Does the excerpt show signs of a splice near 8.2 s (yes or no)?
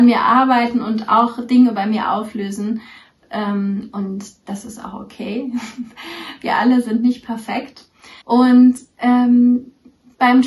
yes